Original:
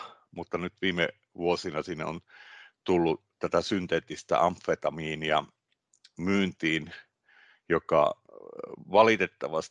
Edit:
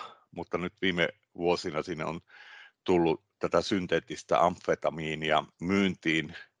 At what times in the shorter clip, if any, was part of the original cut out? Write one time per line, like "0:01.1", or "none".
0:05.5